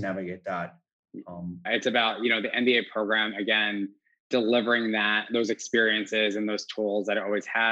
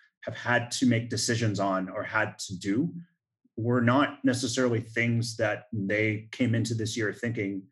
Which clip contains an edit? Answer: first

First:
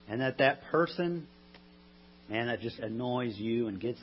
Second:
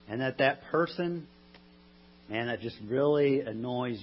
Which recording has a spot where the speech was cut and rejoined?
first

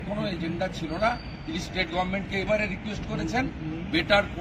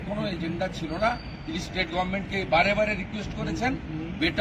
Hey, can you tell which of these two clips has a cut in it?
first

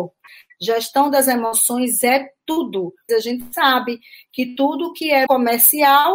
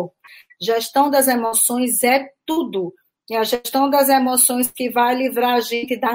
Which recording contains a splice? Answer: first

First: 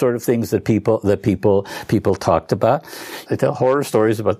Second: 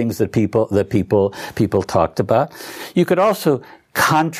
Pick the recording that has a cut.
first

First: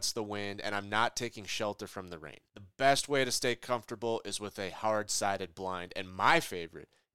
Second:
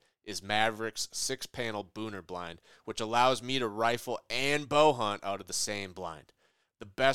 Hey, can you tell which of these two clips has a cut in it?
first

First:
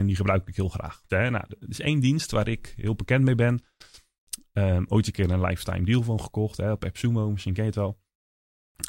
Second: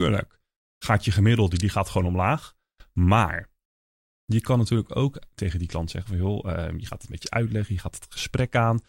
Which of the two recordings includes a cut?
first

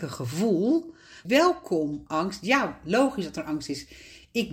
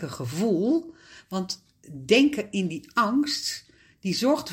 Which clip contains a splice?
first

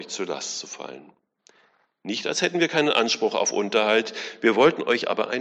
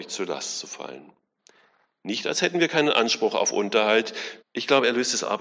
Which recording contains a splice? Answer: second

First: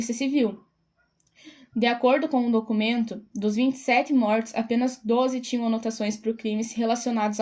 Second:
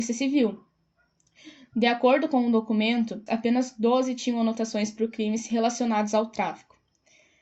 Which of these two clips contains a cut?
second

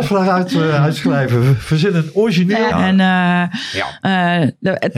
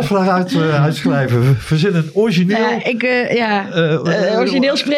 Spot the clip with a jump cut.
first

